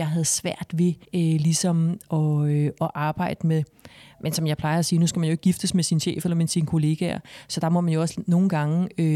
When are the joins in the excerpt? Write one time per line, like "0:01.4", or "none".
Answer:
0:01.0